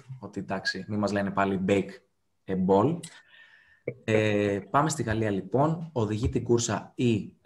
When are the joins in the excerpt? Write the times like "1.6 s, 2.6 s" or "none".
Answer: none